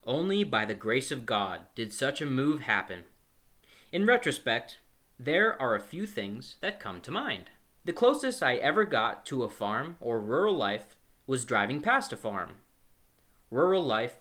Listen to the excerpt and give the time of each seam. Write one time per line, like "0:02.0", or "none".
0:07.8

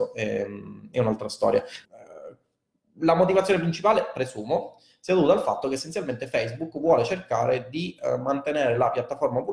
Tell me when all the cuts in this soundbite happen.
0:01.8

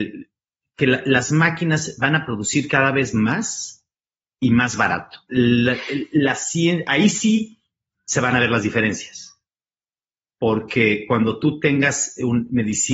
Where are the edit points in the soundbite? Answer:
0:05.3

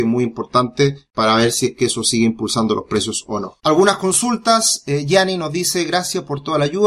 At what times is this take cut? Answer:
0:03.6

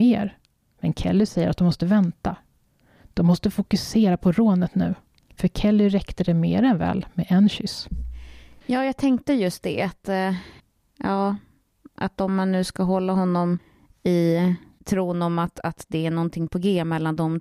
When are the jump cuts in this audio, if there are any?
none

